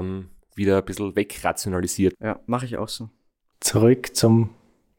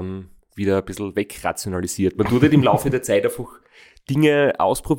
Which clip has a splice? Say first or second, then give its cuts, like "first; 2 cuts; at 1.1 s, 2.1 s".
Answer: first; 1 cut; at 2.1 s